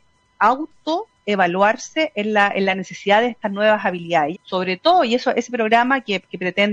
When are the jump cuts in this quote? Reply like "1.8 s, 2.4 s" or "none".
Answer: 4.3 s

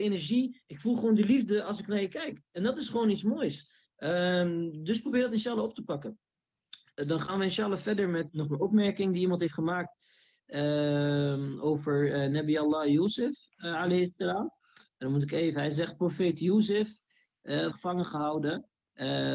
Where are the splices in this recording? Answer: 8.3 s, 17.7 s

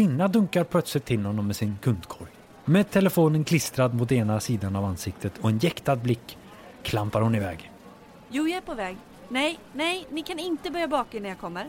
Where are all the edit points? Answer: 2.6 s

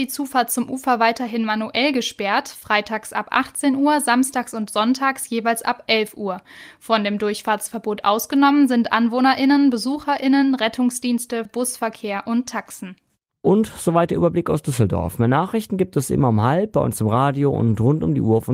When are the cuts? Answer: 11.5 s

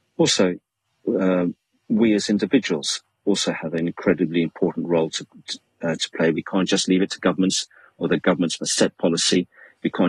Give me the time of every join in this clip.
none

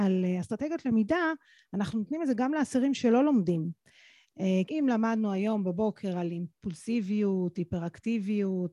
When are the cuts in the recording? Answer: 4.7 s

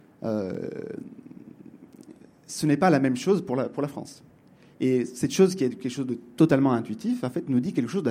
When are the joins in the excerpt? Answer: none

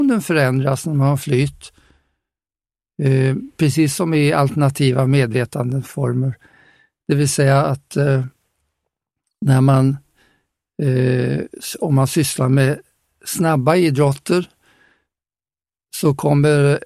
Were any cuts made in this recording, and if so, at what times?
none

